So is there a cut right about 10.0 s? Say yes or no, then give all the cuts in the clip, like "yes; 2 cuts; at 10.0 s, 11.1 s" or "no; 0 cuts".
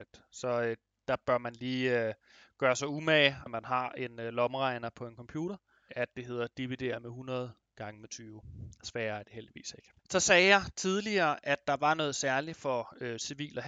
yes; 3 cuts; at 3.5 s, 5.9 s, 10.0 s